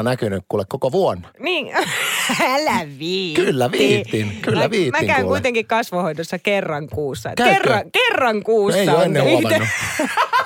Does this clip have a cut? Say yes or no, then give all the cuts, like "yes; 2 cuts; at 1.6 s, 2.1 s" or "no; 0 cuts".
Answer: no; 0 cuts